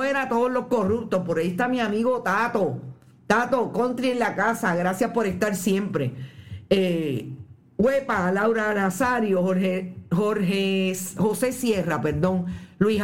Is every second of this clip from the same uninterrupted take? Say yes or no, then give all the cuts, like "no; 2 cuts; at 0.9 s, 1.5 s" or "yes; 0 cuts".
yes; 0 cuts